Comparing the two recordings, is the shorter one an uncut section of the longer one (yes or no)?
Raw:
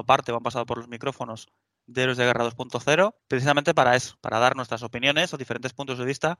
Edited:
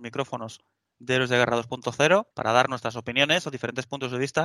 no